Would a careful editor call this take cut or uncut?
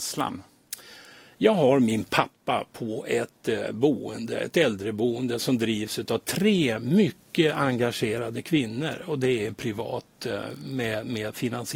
uncut